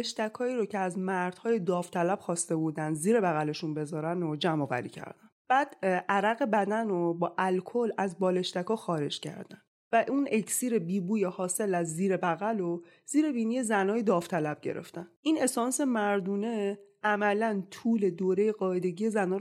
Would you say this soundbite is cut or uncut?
uncut